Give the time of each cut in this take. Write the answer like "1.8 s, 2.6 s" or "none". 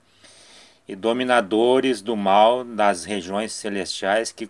none